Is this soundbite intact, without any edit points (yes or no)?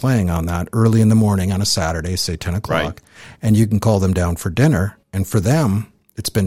no